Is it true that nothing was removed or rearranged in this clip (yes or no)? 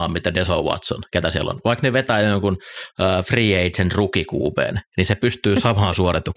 yes